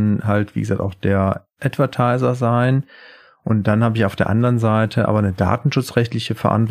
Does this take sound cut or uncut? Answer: uncut